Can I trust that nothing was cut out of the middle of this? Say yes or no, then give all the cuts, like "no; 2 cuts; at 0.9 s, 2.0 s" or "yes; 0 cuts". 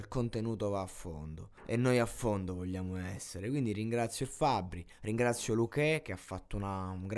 no; 1 cut; at 1.6 s